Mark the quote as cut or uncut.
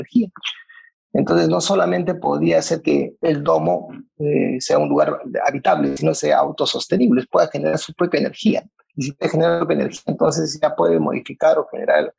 uncut